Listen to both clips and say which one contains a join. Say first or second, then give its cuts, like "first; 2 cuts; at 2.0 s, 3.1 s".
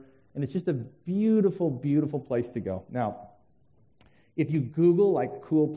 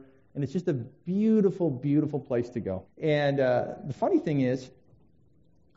second; 1 cut; at 2.9 s